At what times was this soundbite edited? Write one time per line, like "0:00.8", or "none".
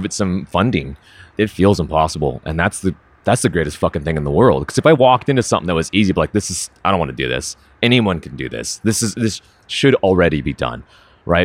0:01.3